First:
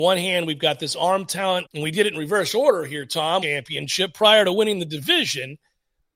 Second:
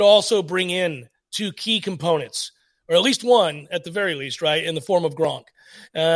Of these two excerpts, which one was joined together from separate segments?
first; 2 cuts; at 1.7 s, 3.4 s

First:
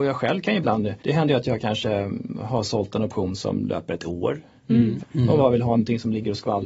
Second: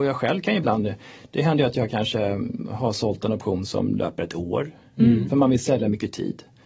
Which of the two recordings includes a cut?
first; 2 cuts; at 1.0 s, 5.0 s

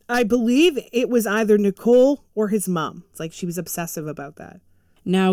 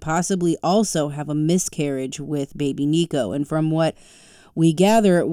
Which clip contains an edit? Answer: first; 1 cut; at 3.1 s

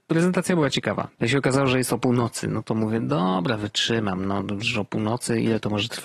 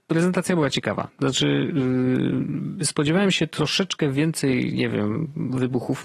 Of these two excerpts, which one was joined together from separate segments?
first; 1 cut; at 1.1 s

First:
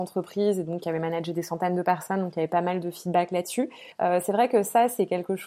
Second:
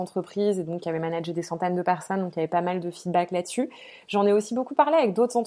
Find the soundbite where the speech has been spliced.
first; 1 cut; at 3.9 s

